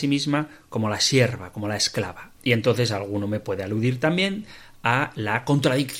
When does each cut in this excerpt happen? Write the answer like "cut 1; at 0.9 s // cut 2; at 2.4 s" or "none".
cut 1; at 2.4 s